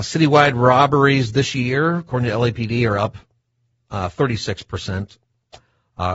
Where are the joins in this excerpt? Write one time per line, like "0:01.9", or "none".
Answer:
none